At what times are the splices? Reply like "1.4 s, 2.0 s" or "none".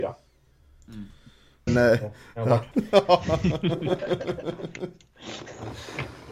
1.7 s, 2.7 s